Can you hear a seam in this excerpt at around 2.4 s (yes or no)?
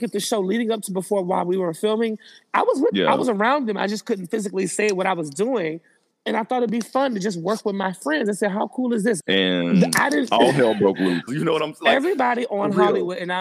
no